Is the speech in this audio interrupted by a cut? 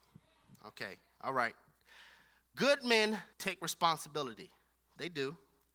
yes; 1 cut; at 3.3 s

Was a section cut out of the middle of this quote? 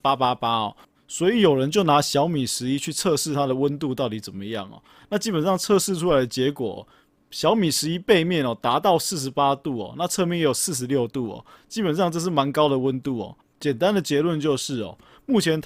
yes; 1 cut; at 13.4 s

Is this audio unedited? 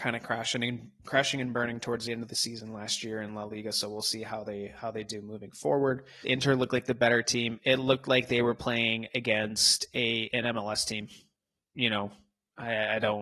no; 1 cut; at 6.2 s

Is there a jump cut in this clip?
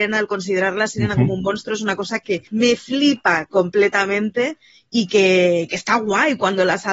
yes; 1 cut; at 2.5 s

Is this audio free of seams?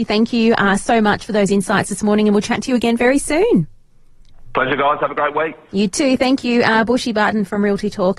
yes; 0 cuts

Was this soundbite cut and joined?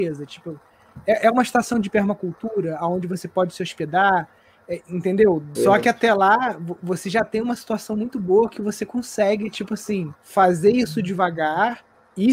yes; 2 cuts; at 5.5 s, 10.2 s

